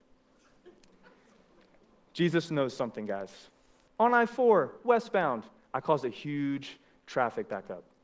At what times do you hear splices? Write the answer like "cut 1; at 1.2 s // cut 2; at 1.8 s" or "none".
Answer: cut 1; at 3.9 s